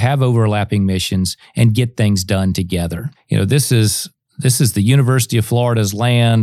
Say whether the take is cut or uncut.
uncut